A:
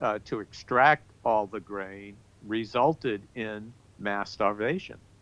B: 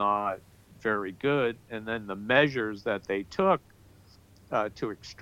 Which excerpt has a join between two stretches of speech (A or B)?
A